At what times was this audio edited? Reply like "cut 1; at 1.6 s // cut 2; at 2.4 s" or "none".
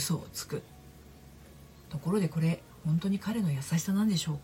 cut 1; at 1.8 s